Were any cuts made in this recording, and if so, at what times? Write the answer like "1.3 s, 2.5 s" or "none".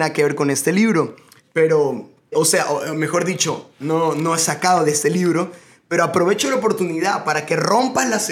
2.3 s